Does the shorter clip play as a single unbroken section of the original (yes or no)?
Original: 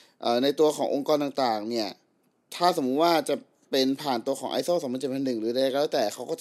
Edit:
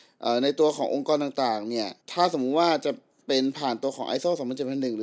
no